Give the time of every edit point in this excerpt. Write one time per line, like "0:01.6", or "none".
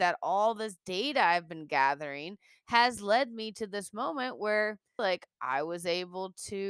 0:05.0